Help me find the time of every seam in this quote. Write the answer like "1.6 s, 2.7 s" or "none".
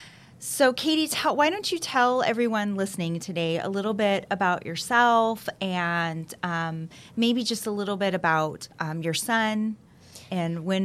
8.7 s